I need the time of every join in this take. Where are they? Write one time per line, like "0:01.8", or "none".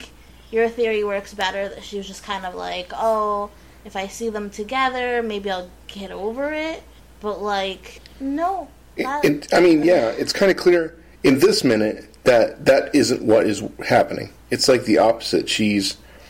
none